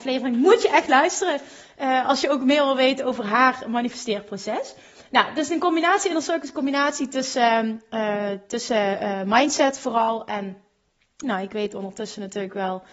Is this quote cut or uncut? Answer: cut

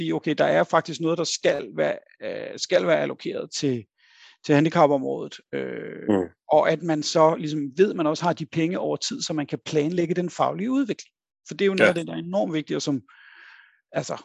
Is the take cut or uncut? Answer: uncut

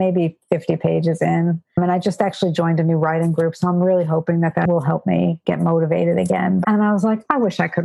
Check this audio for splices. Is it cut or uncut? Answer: cut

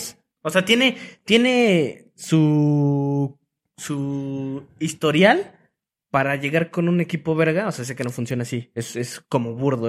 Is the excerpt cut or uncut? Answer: uncut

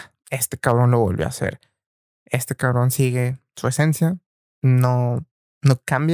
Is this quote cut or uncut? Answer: uncut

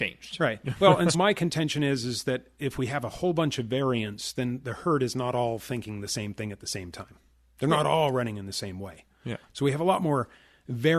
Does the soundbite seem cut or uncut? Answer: cut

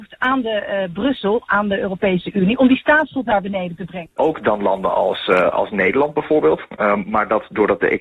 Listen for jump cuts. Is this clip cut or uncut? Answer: cut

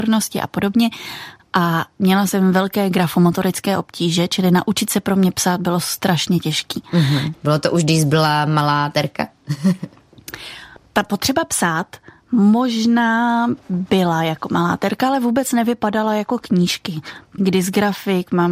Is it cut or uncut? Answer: cut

